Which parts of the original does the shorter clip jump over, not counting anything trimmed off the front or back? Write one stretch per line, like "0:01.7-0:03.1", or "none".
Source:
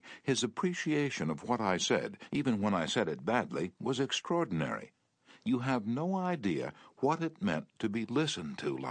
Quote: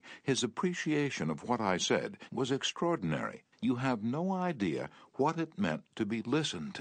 0:02.3-0:03.8
0:05.0-0:05.4